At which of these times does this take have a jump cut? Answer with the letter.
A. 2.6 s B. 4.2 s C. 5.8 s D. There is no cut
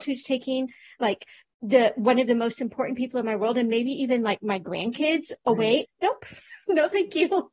C